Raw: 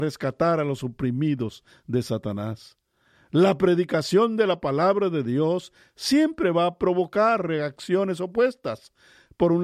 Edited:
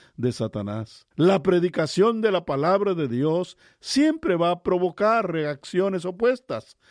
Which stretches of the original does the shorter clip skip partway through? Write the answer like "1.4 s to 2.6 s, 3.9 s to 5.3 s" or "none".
2.8 s to 3.3 s